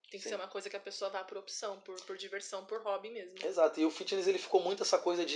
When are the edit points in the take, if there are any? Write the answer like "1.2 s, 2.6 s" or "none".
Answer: none